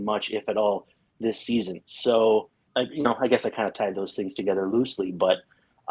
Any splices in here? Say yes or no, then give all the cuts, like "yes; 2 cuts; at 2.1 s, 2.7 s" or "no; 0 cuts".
yes; 1 cut; at 2.7 s